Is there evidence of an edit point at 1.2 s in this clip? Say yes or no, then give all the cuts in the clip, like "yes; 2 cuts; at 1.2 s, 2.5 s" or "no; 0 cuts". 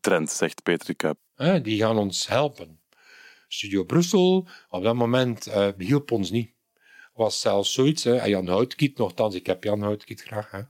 yes; 1 cut; at 1.2 s